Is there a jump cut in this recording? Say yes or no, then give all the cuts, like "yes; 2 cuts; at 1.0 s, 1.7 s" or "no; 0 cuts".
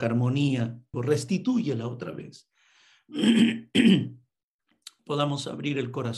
yes; 2 cuts; at 0.9 s, 5.0 s